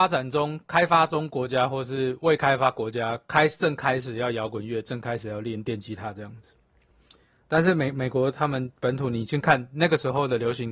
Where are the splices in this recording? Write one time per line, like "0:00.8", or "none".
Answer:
none